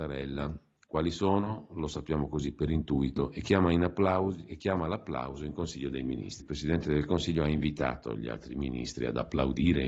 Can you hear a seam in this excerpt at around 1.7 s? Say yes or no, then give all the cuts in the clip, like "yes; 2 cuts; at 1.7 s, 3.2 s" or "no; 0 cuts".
no; 1 cut; at 6.4 s